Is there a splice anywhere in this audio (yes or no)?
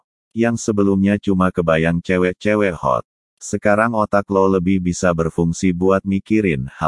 no